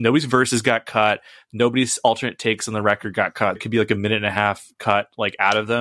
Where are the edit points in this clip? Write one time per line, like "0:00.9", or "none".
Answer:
0:03.6